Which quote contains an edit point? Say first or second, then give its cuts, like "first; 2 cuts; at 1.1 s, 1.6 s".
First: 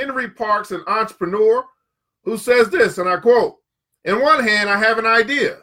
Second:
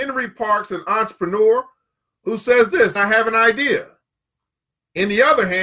second; 1 cut; at 3.0 s